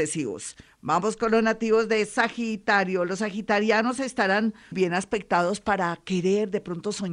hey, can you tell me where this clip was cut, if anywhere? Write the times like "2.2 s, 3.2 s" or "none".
4.7 s